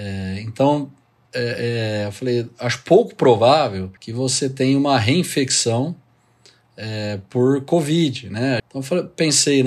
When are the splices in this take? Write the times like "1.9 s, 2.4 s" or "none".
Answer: 4.0 s, 8.6 s